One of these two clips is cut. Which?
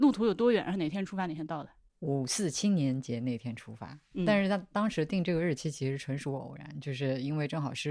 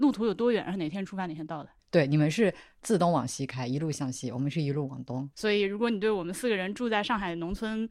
second; 2 cuts; at 1.8 s, 5.3 s

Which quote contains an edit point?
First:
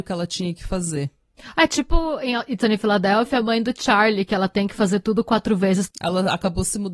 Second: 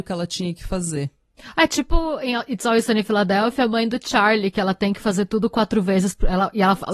first; 2 cuts; at 2.6 s, 5.9 s

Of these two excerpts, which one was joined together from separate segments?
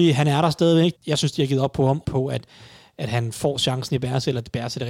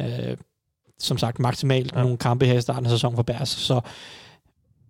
first; 2 cuts; at 0.9 s, 2.0 s

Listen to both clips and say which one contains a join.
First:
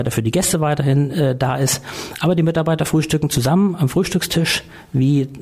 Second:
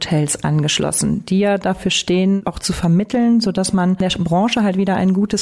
second; 1 cut; at 2.4 s

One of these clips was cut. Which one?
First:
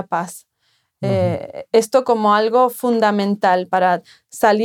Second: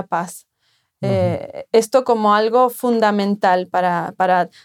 first; 1 cut; at 3.7 s

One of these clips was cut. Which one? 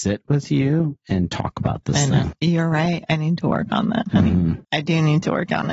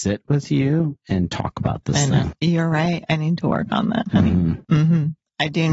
first; 1 cut; at 4.6 s

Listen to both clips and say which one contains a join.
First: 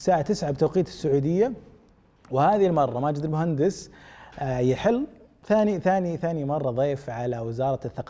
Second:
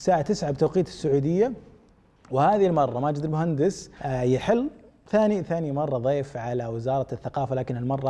second; 2 cuts; at 4.0 s, 5.5 s

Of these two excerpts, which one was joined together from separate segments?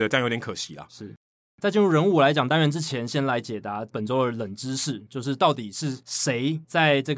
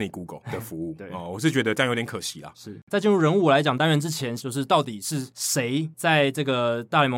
second; 2 cuts; at 2.8 s, 4.4 s

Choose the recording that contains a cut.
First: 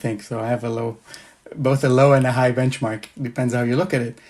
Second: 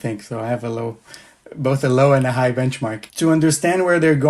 second; 1 cut; at 3.1 s

